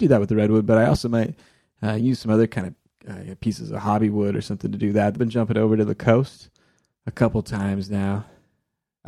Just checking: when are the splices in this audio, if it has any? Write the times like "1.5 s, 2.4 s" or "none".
5.1 s